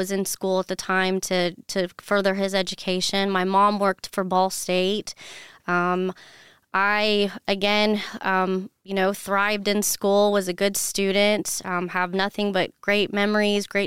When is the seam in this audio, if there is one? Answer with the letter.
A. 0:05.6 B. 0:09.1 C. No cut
C